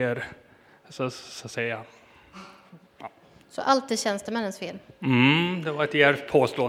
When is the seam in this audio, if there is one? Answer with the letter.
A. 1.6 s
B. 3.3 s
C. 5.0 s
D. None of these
C